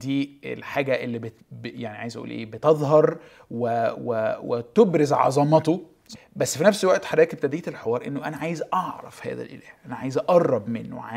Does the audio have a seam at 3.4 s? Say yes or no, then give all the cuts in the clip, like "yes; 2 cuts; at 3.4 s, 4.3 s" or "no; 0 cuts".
no; 1 cut; at 6.1 s